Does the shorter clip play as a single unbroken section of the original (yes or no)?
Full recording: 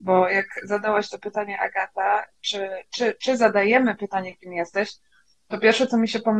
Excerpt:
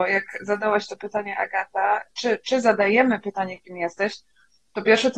no